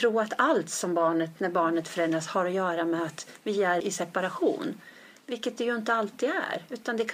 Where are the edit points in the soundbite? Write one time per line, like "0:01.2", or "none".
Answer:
0:03.8